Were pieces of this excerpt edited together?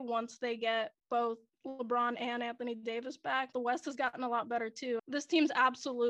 yes; 2 cuts; at 3.5 s, 5.0 s

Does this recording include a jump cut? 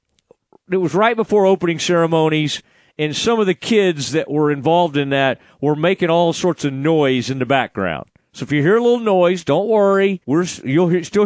yes; 1 cut; at 10.2 s

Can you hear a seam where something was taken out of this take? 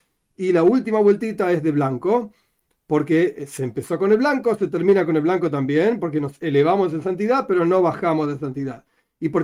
no; 0 cuts

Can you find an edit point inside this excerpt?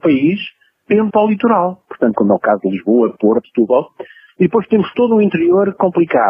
yes; 3 cuts; at 1.1 s, 2.1 s, 3.4 s

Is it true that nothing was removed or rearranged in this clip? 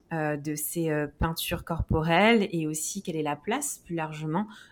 yes; 0 cuts

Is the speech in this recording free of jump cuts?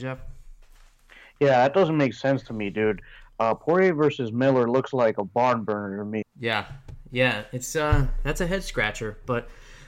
no; 1 cut; at 6.2 s

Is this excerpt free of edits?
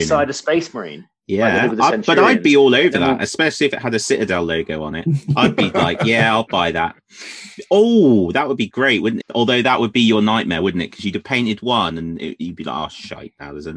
no; 1 cut; at 9.2 s

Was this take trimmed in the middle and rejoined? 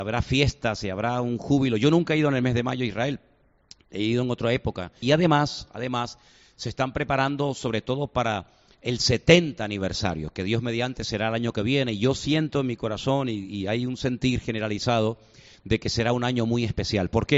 yes; 1 cut; at 5.0 s

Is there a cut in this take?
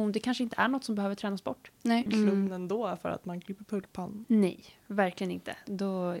yes; 2 cuts; at 2.1 s, 4.2 s

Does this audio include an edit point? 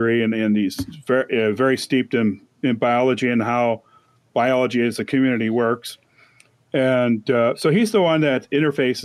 no; 0 cuts

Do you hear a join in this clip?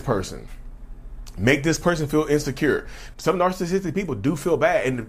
yes; 1 cut; at 3.1 s

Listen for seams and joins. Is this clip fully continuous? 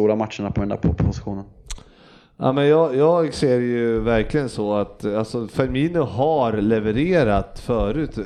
yes; 0 cuts

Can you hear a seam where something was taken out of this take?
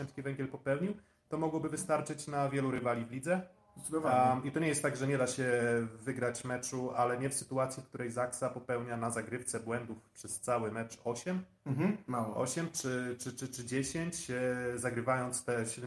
no; 0 cuts

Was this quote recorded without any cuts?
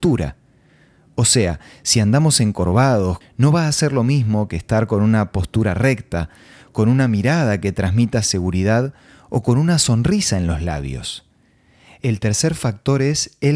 no; 1 cut; at 3.2 s

